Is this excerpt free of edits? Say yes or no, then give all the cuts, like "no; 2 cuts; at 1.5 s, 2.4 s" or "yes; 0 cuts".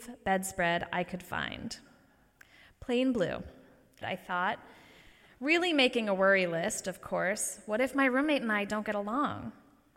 no; 1 cut; at 4.0 s